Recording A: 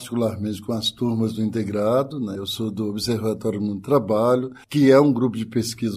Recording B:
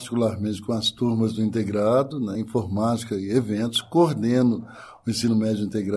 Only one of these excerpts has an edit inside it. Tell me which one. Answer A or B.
A